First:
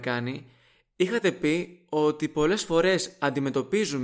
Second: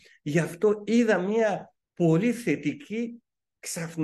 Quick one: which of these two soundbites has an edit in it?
second; 1 cut; at 1.8 s

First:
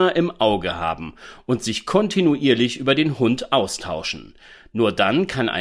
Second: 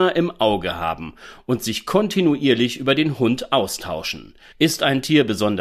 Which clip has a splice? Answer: second; 1 cut; at 4.5 s

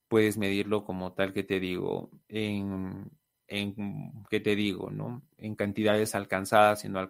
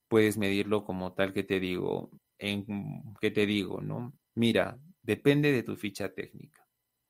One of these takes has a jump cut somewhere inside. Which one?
second; 2 cuts; at 2.2 s, 4.2 s

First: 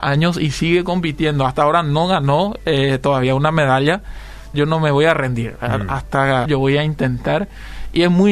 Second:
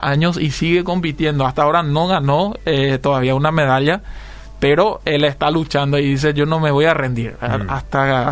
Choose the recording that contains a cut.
first; 2 cuts; at 4.5 s, 6.4 s

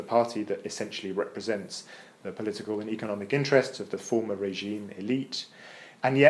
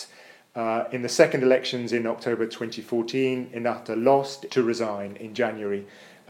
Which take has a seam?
second; 1 cut; at 4.5 s

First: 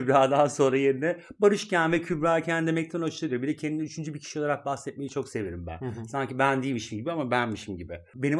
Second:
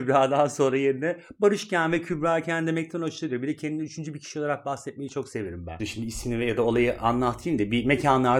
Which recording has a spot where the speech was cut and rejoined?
second; 1 cut; at 5.8 s

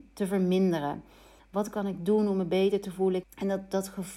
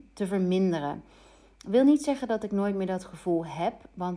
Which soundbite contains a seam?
first; 2 cuts; at 1.4 s, 3.2 s

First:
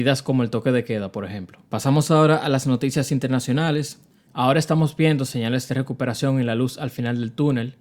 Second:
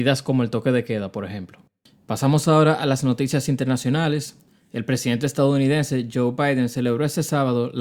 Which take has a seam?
first; 2 cuts; at 1.7 s, 4.3 s

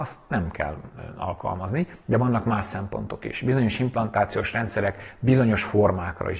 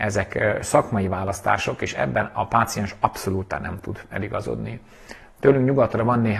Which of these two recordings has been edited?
first; 1 cut; at 2.0 s

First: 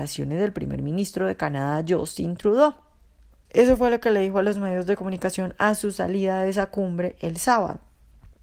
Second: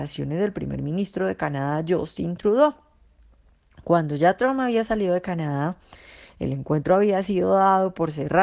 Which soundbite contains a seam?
first; 1 cut; at 3.5 s

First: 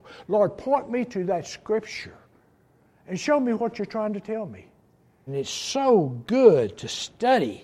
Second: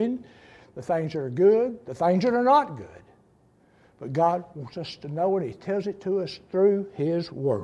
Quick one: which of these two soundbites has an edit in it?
first; 1 cut; at 5.3 s

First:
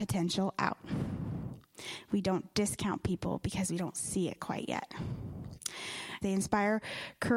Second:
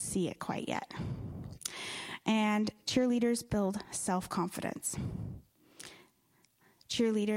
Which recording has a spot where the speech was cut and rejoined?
first; 1 cut; at 6.2 s

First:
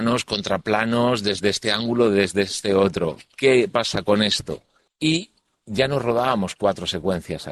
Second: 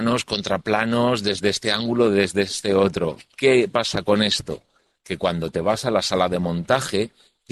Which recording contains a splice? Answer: first; 1 cut; at 4.9 s

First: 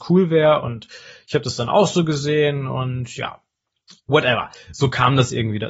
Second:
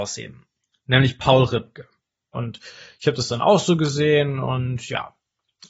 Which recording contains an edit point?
second; 1 cut; at 2.3 s

